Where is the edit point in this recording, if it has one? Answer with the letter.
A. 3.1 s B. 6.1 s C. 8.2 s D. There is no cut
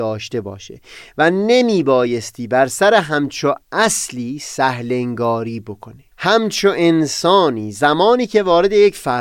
B